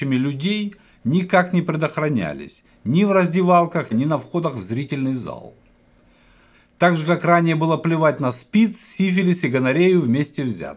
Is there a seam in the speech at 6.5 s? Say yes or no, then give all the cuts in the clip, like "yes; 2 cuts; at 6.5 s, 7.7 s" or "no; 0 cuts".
yes; 2 cuts; at 3.9 s, 6.5 s